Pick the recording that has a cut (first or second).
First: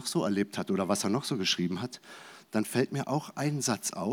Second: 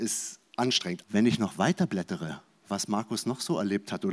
second